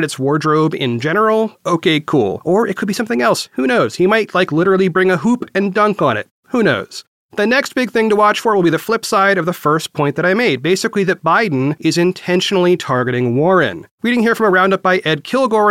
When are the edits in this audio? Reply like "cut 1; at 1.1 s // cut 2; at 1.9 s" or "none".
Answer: cut 1; at 1.5 s // cut 2; at 13.9 s